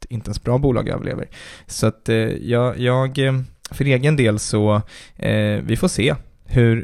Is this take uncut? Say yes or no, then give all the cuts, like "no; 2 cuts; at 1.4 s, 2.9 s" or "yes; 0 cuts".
no; 1 cut; at 1.6 s